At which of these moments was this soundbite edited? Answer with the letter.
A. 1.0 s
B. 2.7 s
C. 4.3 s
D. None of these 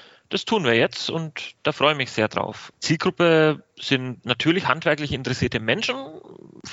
B